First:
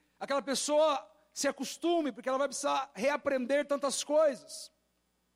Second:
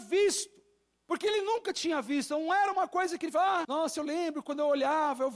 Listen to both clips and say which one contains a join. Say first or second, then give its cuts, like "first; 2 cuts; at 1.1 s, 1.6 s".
second; 2 cuts; at 1.1 s, 3.6 s